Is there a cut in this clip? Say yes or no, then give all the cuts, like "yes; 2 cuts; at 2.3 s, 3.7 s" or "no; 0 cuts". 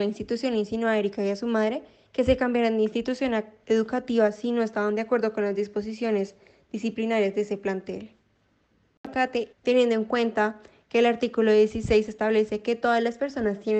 yes; 1 cut; at 9.5 s